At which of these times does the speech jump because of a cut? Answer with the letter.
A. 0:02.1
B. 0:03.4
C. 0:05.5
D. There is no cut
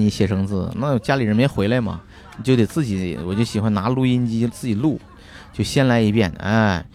D